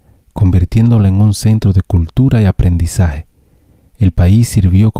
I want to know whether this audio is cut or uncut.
uncut